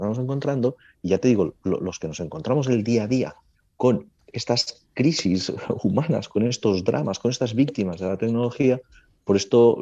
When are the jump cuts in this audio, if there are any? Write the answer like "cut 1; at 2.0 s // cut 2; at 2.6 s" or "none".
none